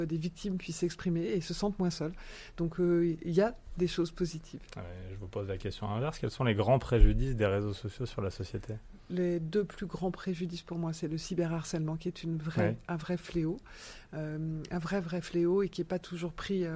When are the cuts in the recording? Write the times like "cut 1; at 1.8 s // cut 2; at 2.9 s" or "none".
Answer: none